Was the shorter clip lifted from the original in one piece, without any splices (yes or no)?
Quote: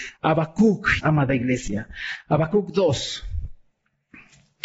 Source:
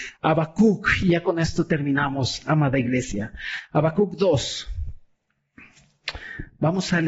no